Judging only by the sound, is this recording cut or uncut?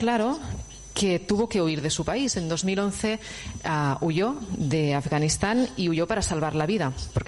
uncut